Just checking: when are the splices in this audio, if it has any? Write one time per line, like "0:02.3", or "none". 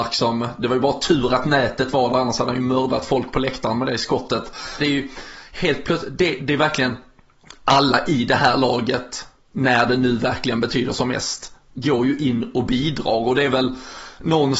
0:04.8

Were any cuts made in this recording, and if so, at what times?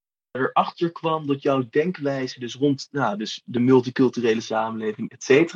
none

